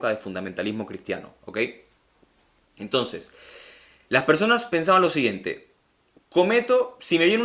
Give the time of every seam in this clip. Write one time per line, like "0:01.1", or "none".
none